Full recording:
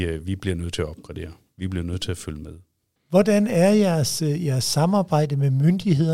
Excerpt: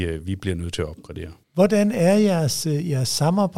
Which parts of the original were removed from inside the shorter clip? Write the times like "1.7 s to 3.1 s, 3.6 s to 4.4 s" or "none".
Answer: 1.4 s to 3.0 s